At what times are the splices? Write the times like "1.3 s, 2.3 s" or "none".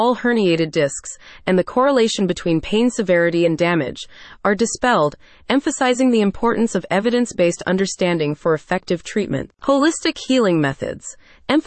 none